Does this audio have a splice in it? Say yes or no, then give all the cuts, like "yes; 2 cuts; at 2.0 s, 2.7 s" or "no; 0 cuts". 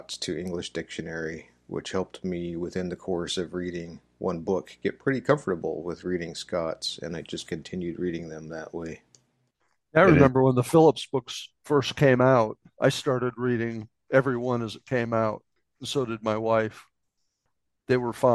no; 0 cuts